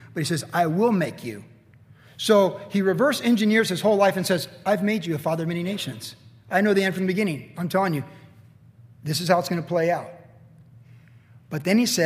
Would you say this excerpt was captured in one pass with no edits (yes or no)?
yes